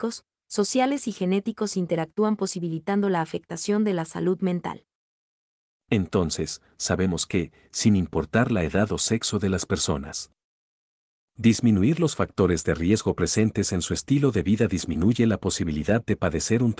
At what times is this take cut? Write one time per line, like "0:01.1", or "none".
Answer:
none